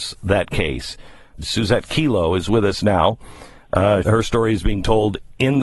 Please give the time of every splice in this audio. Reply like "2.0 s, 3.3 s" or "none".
1.4 s, 4.0 s